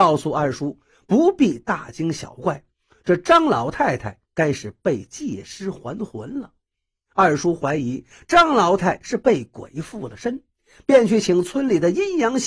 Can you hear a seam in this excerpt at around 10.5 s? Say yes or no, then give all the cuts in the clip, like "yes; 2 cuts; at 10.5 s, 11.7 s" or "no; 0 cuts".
no; 2 cuts; at 7.1 s, 8.8 s